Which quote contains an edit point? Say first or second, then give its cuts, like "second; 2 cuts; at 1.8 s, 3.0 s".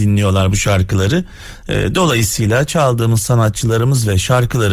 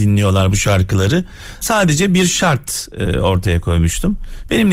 second; 1 cut; at 1.6 s